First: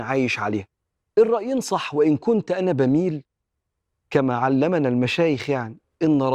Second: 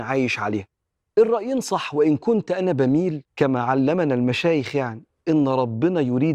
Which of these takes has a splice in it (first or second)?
second